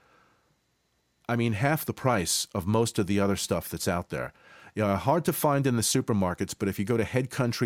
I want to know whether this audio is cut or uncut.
uncut